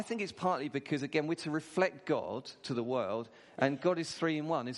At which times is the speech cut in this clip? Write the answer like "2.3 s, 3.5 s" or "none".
none